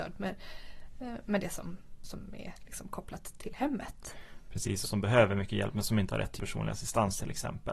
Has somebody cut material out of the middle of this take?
yes; 2 cuts; at 4.8 s, 6.4 s

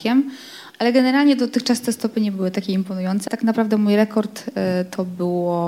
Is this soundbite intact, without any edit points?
no; 1 cut; at 3.3 s

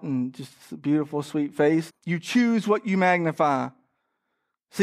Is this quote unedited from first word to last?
no; 1 cut; at 1.9 s

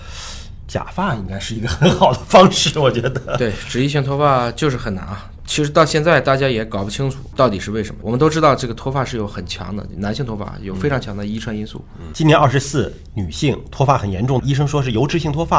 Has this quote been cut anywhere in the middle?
yes; 2 cuts; at 12.1 s, 14.4 s

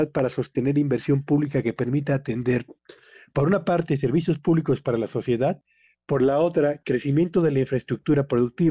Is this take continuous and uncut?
yes; 0 cuts

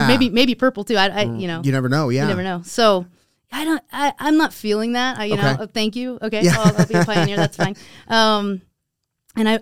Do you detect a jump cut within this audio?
no; 0 cuts

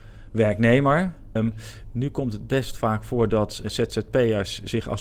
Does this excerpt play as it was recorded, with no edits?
no; 2 cuts; at 1.4 s, 3.6 s

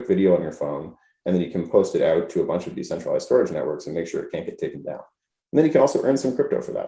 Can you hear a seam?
no; 0 cuts

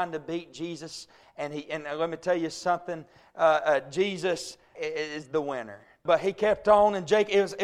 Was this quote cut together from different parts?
yes; 2 cuts; at 4.7 s, 6.1 s

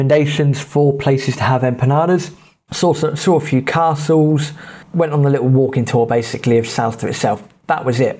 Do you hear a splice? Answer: yes; 1 cut; at 2.7 s

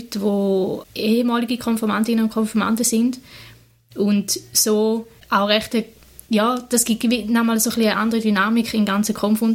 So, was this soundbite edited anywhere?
no; 0 cuts

